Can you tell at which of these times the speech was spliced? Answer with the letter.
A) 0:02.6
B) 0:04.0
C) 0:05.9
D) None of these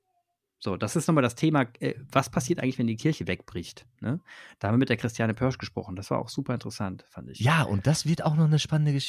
D